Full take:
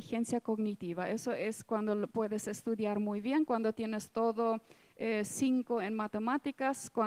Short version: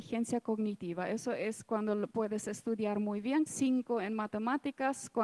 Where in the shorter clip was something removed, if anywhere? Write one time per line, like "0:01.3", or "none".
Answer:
0:03.5